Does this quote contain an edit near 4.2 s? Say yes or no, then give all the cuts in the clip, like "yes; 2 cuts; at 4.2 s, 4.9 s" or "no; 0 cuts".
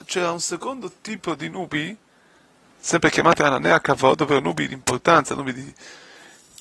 no; 0 cuts